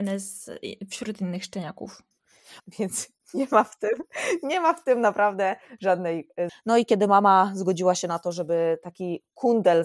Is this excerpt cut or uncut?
cut